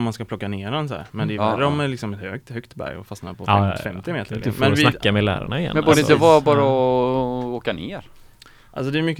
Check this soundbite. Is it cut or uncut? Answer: cut